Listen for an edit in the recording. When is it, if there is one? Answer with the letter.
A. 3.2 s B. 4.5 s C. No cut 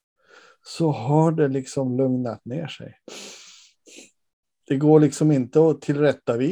B